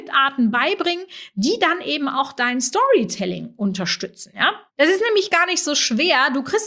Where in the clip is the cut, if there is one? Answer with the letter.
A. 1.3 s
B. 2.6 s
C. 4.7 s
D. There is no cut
C